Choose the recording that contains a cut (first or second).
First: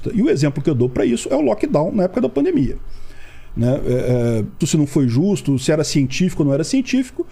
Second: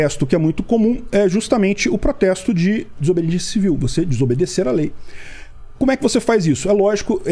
first